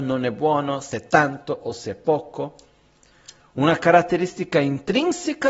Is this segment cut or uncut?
uncut